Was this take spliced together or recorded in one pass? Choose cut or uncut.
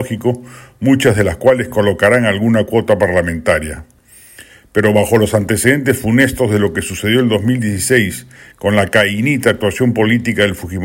uncut